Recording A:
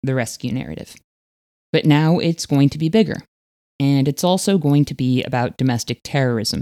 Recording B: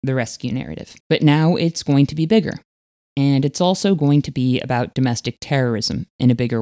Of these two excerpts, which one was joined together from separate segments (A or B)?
B